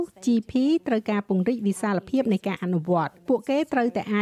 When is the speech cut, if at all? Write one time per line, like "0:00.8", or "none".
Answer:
0:03.2

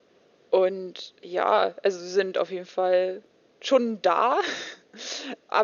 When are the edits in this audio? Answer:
0:01.2

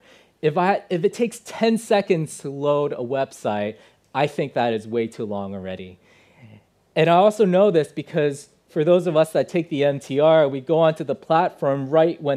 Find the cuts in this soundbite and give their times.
none

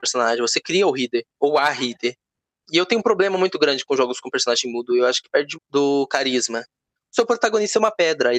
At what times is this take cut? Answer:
0:02.6
0:05.5
0:07.0

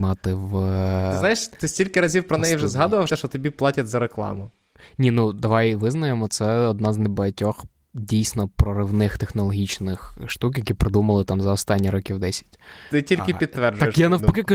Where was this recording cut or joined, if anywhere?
0:03.1

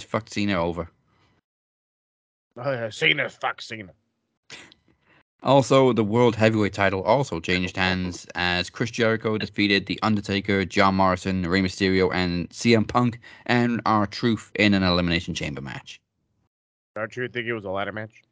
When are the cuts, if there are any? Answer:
0:14.5

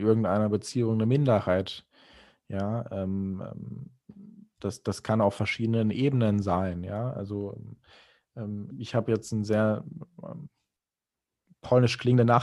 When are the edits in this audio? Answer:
0:08.7

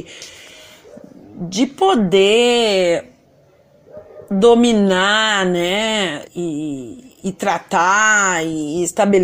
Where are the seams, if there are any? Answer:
none

